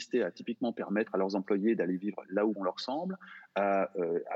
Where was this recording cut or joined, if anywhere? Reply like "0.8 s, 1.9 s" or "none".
2.6 s